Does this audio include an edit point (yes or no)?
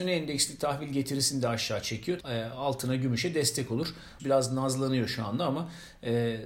yes